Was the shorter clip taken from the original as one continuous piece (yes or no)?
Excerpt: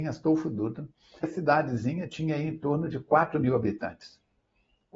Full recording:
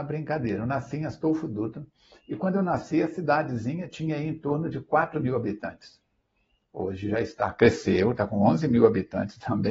no